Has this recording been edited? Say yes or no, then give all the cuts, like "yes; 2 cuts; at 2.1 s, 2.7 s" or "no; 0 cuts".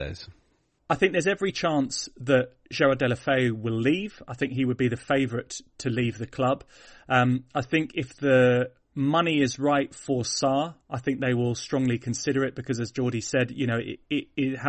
no; 0 cuts